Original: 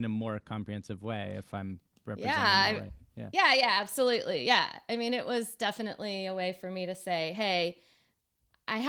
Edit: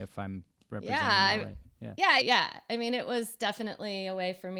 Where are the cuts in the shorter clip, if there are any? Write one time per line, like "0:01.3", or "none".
0:02.2